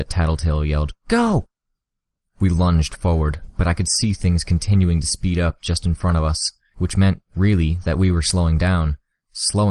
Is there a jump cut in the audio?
no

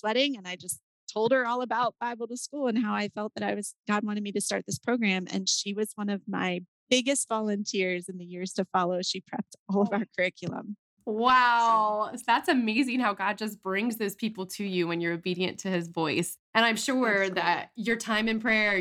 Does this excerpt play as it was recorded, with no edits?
no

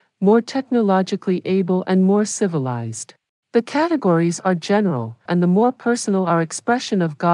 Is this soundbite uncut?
no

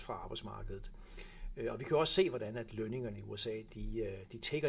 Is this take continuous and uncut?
yes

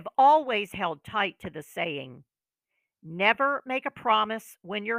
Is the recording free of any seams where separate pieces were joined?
yes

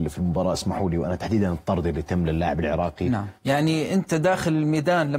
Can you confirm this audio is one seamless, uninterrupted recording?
no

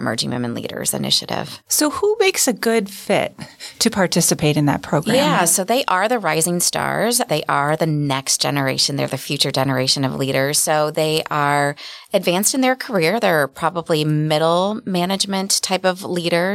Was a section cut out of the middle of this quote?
no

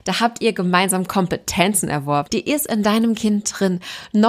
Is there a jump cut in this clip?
yes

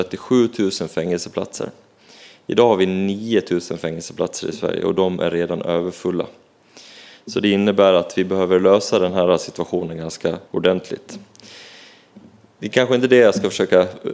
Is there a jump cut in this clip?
yes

